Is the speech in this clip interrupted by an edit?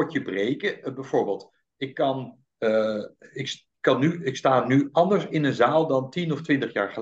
no; 0 cuts

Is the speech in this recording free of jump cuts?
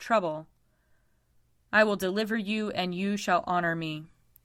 yes; 0 cuts

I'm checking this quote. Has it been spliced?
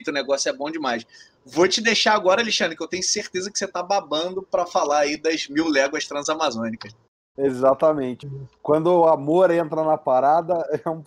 yes; 1 cut; at 8.2 s

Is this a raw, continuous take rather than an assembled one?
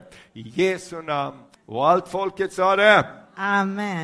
no; 1 cut; at 1.5 s

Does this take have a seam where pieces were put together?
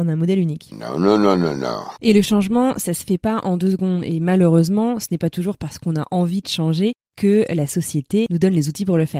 no; 0 cuts

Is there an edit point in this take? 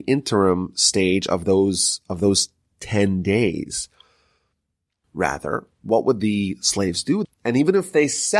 yes; 2 cuts; at 5.0 s, 7.2 s

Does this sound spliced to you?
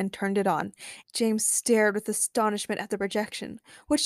yes; 1 cut; at 1.0 s

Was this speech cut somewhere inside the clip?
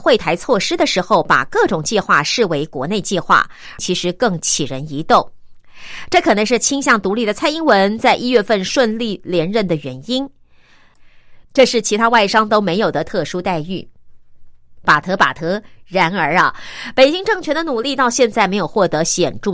yes; 2 cuts; at 3.8 s, 11.4 s

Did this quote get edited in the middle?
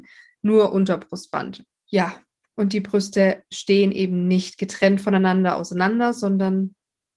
yes; 1 cut; at 1.7 s

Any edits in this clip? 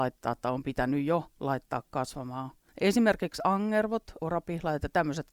yes; 2 cuts; at 2.7 s, 4.2 s

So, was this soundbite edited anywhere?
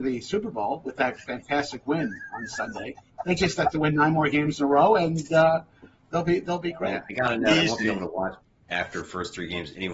no; 0 cuts

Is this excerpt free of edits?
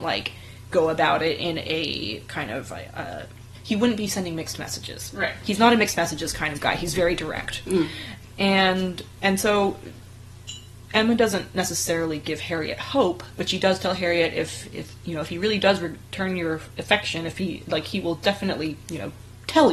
yes; 0 cuts

